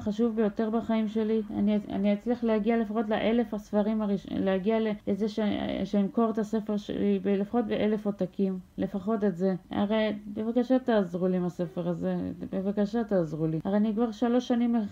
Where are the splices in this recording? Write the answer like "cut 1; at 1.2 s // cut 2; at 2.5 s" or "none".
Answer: none